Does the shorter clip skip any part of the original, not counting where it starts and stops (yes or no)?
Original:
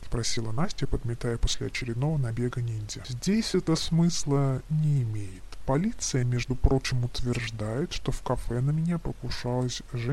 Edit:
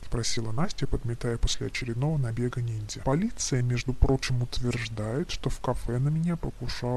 yes